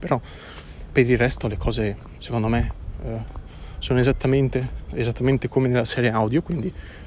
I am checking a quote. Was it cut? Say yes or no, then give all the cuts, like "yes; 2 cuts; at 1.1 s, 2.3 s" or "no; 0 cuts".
no; 0 cuts